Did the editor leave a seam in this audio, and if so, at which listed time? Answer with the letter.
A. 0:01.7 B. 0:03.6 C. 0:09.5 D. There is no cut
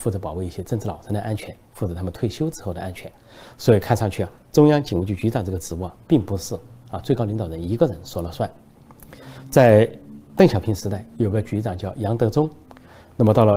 D